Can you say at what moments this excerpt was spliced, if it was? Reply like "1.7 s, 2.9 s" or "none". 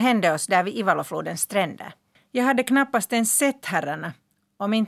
2.1 s